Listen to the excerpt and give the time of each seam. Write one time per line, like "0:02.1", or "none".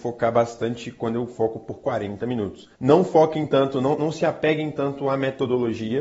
0:02.7
0:04.0

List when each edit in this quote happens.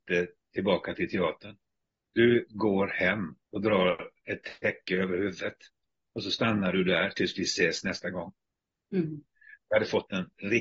0:02.1
0:03.4

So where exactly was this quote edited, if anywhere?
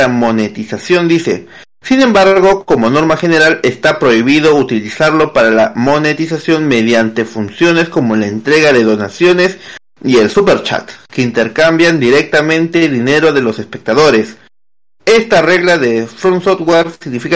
none

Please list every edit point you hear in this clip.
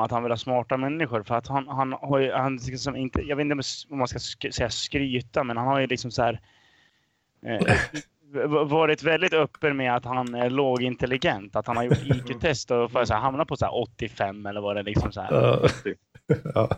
none

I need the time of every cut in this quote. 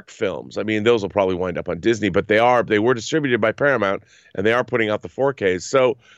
none

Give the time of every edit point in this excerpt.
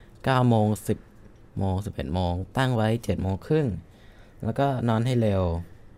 none

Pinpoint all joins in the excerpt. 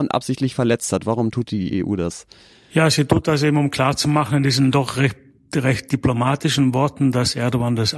none

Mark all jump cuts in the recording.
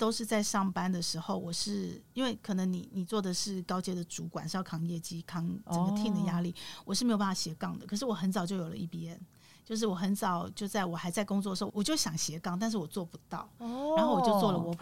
0:05.2
0:11.7

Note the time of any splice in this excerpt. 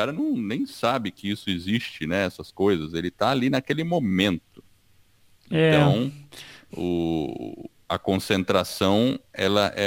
0:07.8

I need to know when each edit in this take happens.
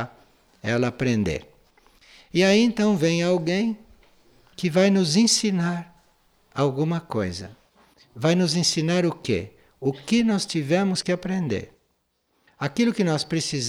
none

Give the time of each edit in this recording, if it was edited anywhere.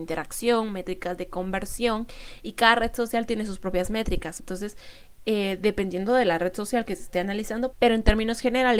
0:04.4
0:07.7

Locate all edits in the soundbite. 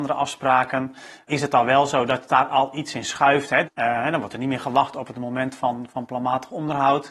0:01.3
0:03.6

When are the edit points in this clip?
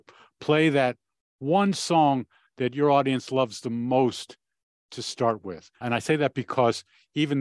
none

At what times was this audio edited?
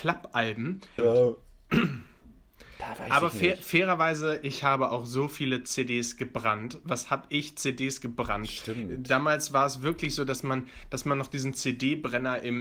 0:01.0

